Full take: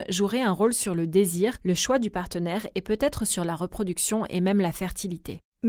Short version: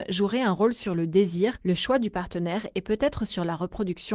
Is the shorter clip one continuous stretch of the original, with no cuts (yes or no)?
yes